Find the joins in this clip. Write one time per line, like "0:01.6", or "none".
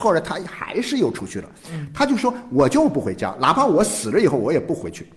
none